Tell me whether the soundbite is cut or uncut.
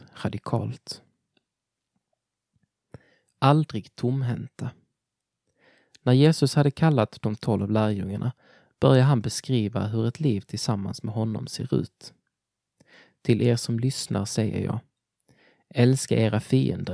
uncut